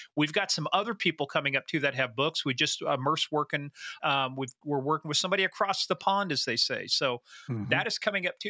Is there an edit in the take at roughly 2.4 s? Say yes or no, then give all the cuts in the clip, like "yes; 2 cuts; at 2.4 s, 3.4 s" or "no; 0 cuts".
no; 1 cut; at 4.0 s